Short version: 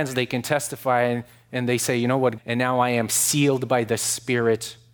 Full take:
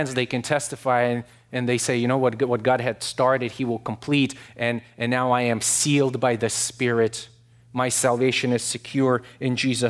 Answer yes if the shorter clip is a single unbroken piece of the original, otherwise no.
no